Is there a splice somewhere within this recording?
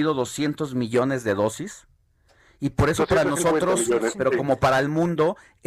no; 0 cuts

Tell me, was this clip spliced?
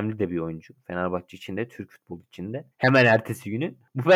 yes; 1 cut; at 2.7 s

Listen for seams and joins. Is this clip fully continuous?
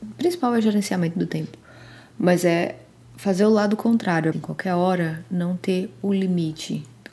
no; 1 cut; at 4.3 s

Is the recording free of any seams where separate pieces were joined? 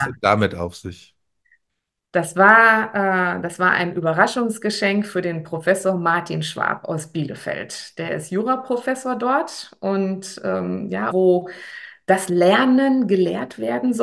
no; 1 cut; at 11.1 s

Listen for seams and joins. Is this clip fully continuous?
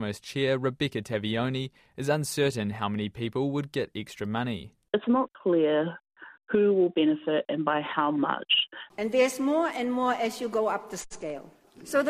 no; 2 cuts; at 5.3 s, 8.9 s

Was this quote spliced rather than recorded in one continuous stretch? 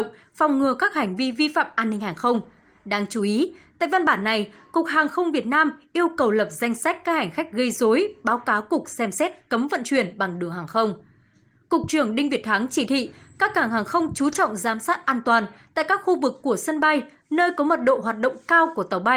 no; 0 cuts

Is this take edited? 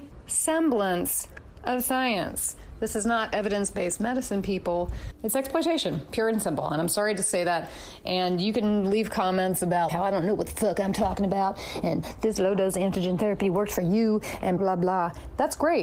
yes; 2 cuts; at 9.9 s, 14.6 s

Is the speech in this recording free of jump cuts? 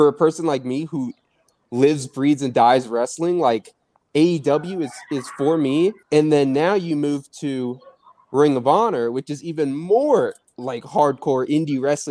no; 1 cut; at 6.0 s

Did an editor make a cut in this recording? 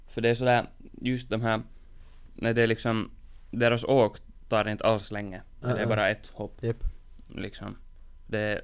no; 0 cuts

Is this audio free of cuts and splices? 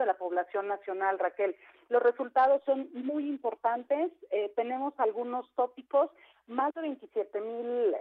yes; 0 cuts

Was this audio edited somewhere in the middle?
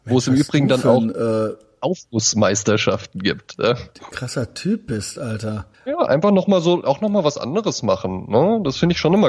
yes; 1 cut; at 5.7 s

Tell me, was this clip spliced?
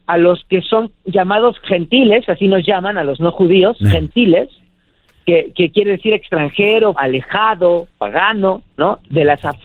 yes; 1 cut; at 6.9 s

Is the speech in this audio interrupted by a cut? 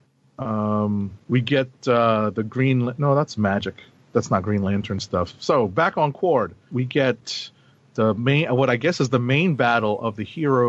yes; 1 cut; at 6.7 s

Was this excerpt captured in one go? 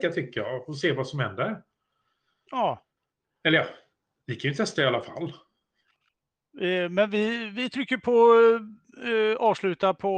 yes; 0 cuts

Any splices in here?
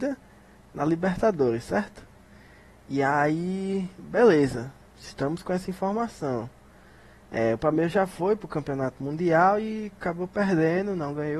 no; 0 cuts

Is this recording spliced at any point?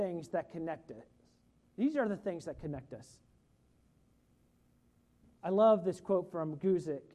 yes; 1 cut; at 5.2 s

